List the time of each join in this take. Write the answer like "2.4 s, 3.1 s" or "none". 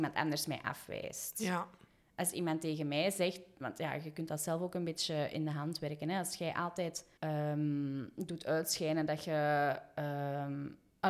7.2 s